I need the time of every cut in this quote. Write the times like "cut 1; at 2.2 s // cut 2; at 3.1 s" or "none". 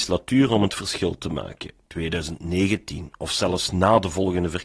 cut 1; at 1.8 s